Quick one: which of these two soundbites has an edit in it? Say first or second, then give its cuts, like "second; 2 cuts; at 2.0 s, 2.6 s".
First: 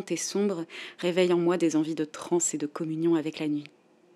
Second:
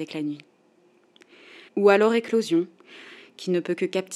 second; 1 cut; at 1.7 s